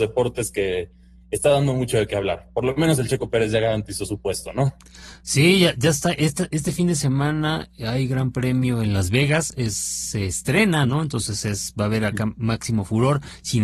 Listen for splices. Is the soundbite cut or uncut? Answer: uncut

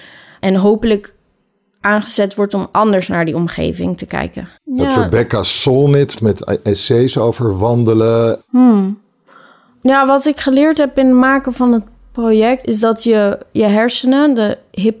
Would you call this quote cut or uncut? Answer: cut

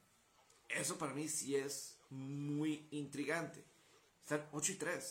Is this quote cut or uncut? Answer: cut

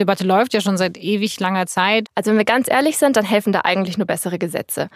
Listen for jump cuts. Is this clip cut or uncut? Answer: cut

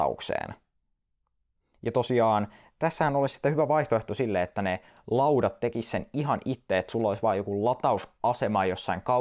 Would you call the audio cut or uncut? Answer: uncut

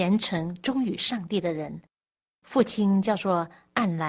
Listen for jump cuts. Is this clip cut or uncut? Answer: uncut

